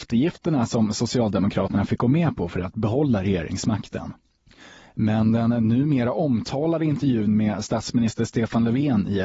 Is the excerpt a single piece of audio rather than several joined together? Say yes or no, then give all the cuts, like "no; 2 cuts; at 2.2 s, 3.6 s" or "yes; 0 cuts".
yes; 0 cuts